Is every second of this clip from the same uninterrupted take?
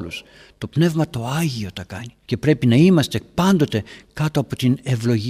no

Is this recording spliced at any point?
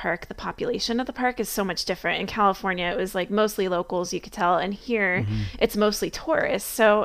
no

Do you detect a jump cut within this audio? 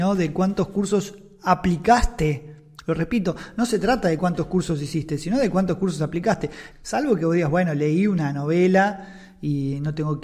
yes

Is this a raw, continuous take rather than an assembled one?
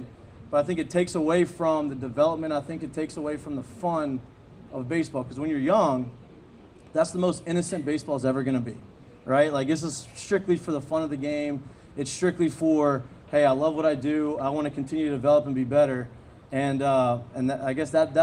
yes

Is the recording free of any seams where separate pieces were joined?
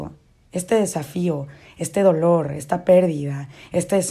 yes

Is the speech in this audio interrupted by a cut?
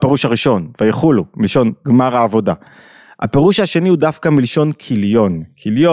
no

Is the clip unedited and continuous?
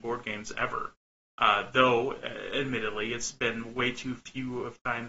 yes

